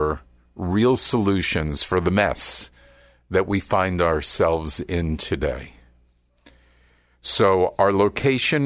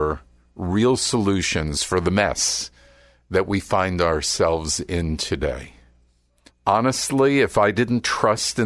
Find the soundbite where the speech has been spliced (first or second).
second